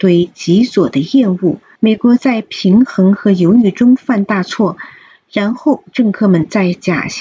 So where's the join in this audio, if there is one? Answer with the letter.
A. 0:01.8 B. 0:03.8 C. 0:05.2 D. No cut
A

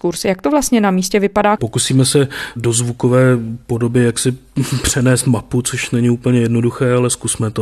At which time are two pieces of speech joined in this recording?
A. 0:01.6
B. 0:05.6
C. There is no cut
A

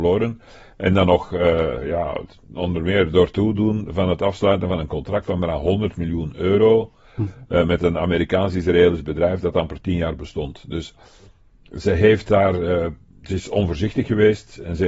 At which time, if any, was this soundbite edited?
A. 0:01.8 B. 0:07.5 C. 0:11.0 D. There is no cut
D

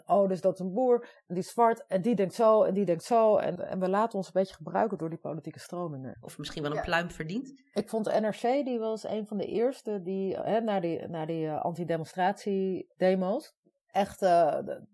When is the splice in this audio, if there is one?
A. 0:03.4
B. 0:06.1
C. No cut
B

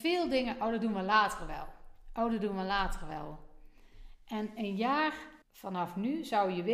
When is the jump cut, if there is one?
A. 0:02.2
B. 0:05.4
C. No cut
B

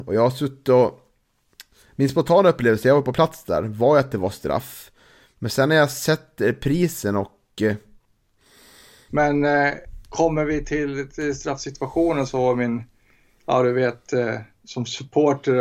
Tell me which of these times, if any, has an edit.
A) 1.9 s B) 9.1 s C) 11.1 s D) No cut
B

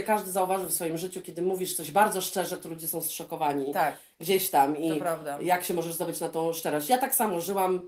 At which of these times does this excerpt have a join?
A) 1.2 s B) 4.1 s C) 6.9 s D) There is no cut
D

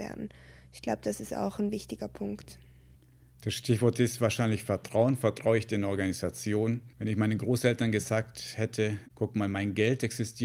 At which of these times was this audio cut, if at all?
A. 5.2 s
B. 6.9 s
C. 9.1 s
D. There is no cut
B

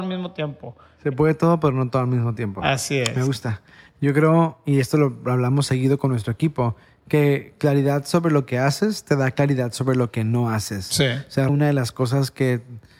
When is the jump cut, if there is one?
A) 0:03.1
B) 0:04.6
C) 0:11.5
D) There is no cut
C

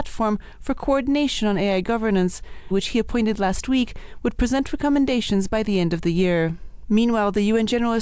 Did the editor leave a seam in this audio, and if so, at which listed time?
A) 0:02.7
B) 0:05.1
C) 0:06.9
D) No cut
A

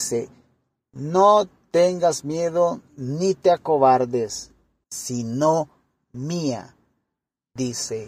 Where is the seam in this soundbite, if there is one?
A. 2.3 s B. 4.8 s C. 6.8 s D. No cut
B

